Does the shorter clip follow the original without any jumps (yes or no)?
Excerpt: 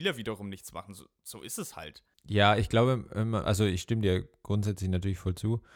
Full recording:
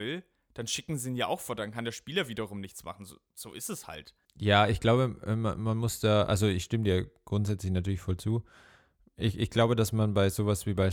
no